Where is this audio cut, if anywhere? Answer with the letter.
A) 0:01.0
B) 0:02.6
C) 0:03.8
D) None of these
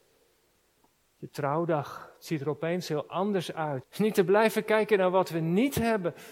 C